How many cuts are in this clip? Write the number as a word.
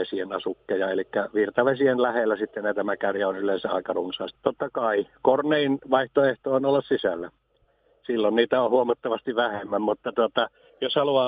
one